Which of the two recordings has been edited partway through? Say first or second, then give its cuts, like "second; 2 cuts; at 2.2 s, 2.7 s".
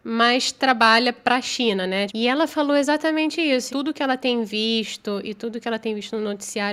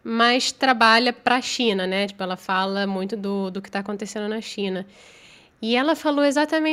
first; 2 cuts; at 2.1 s, 3.7 s